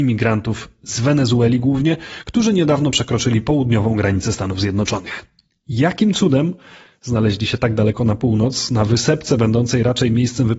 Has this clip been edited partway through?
no; 0 cuts

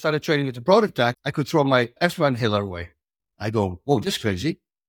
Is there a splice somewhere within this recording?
yes; 1 cut; at 1.1 s

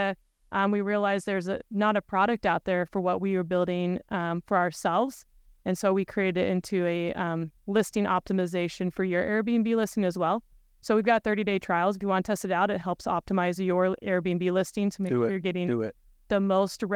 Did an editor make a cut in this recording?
no; 0 cuts

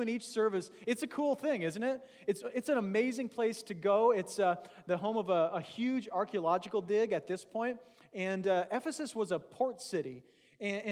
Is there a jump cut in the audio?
no; 0 cuts

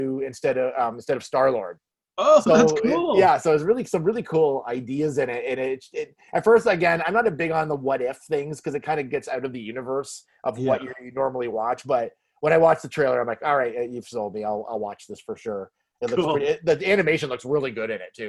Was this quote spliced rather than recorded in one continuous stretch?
no; 0 cuts

